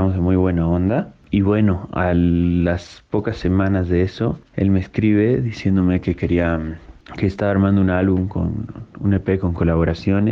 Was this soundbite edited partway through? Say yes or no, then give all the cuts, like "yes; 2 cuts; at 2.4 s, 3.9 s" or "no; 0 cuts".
no; 0 cuts